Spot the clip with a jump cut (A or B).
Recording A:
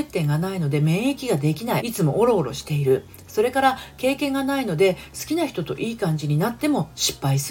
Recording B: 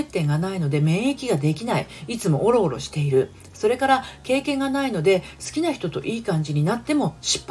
A